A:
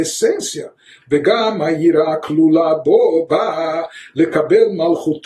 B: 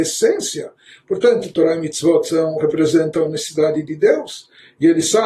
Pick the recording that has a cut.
A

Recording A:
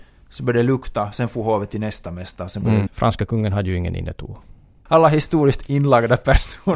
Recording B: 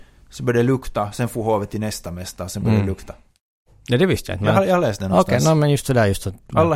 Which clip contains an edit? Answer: A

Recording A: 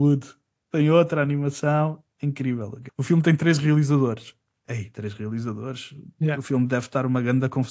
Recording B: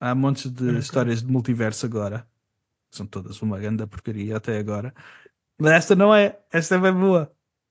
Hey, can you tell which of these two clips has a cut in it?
A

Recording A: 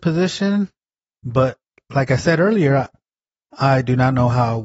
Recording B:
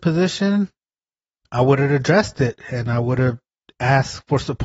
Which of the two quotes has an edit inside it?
A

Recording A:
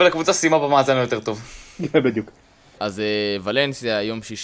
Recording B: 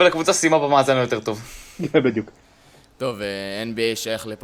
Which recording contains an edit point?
A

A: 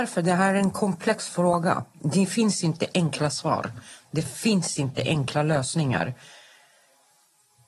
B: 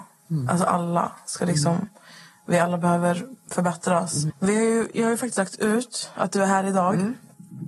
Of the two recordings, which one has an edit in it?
B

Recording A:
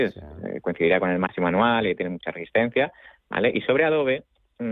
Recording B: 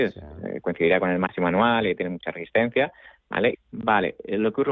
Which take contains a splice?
B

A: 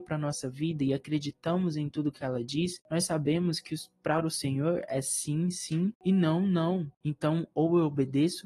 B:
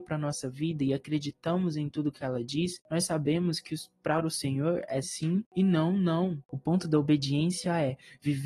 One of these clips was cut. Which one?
B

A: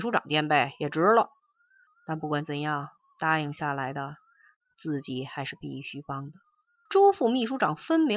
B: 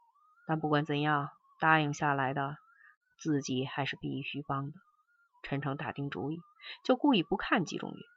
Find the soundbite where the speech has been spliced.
A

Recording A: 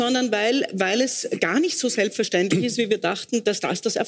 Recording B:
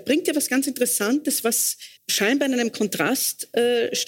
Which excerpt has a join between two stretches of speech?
B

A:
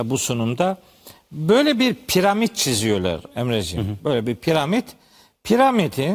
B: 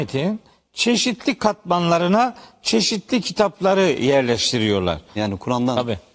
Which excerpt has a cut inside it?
B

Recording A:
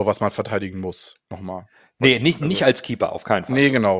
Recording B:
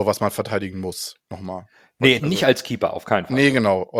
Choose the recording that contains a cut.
B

